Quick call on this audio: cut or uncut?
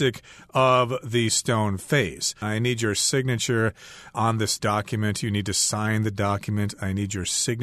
cut